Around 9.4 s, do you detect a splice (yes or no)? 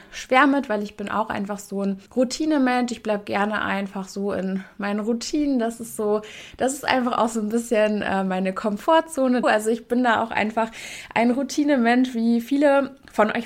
yes